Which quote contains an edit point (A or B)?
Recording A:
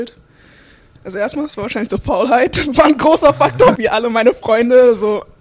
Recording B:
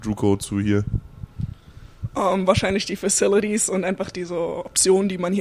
A